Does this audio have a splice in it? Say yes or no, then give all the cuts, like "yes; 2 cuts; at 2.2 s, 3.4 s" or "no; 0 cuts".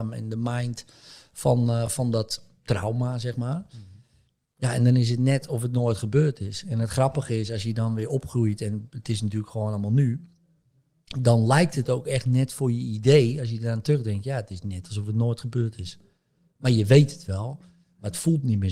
no; 0 cuts